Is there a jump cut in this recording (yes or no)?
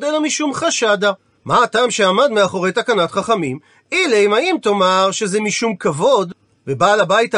yes